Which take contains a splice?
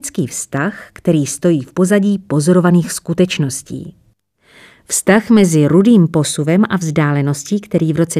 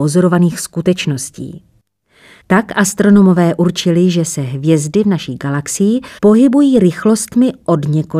second; 2 cuts; at 2.4 s, 6.2 s

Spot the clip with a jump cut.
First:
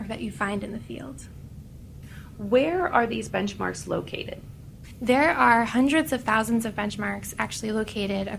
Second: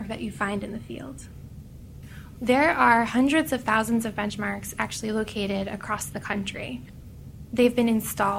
second; 1 cut; at 2.4 s

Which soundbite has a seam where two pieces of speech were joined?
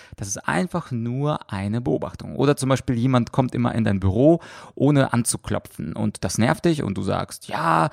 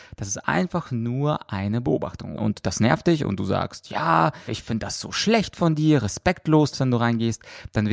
second; 3 cuts; at 2.4 s, 4.5 s, 6.7 s

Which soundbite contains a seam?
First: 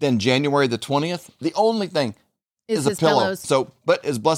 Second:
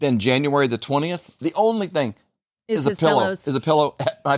first; 1 cut; at 3.4 s

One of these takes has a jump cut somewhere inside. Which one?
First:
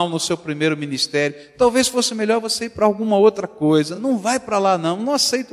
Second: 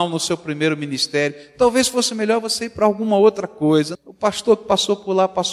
second; 1 cut; at 3.9 s

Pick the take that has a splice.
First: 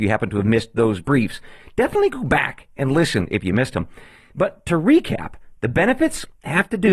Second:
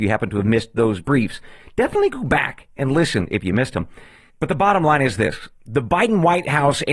second; 1 cut; at 4.3 s

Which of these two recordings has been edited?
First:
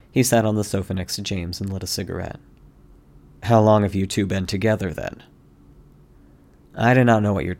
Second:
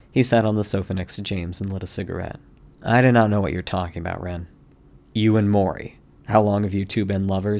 second; 1 cut; at 2.7 s

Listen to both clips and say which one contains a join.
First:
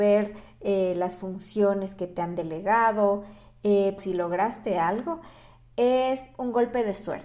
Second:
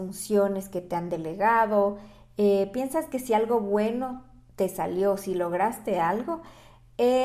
first; 1 cut; at 4.0 s

